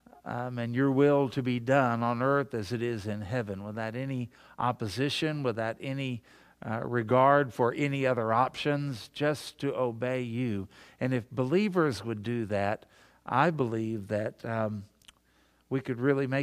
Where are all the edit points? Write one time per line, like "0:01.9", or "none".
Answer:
none